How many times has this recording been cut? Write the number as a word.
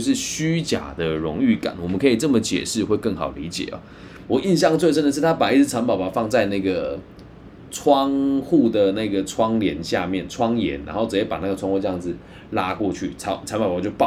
one